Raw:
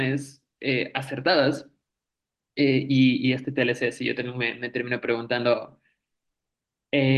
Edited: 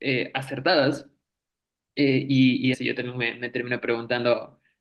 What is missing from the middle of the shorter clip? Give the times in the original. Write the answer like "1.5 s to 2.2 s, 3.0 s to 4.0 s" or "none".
3.3 s to 3.9 s